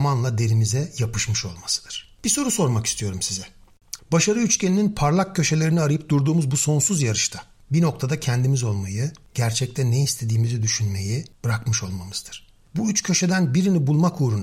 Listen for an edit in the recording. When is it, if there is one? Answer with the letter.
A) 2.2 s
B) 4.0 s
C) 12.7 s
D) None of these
B